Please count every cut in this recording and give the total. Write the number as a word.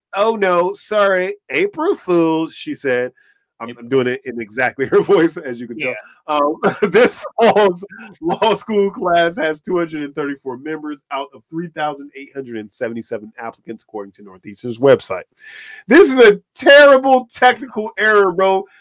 zero